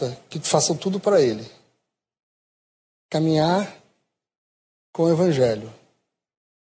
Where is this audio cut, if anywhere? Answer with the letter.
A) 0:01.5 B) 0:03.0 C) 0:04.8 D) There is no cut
B